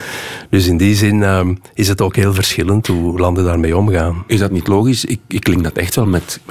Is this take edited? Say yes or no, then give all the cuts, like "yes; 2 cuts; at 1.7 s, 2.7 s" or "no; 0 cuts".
no; 0 cuts